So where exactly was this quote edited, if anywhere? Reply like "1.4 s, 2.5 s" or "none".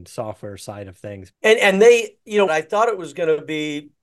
1.3 s, 2.5 s